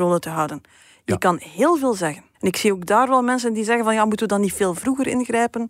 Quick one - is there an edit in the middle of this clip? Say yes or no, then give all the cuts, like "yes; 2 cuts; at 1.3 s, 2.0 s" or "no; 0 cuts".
yes; 1 cut; at 2.3 s